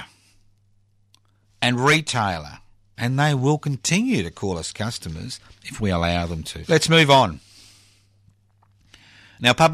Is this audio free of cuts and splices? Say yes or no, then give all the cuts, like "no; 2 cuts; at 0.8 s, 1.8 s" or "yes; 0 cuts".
no; 2 cuts; at 2.9 s, 6.6 s